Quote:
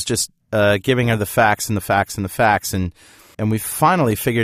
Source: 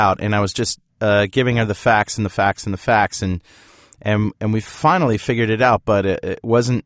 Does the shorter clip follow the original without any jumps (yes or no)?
no